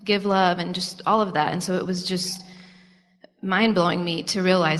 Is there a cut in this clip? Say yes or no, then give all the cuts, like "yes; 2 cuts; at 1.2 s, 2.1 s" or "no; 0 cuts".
no; 0 cuts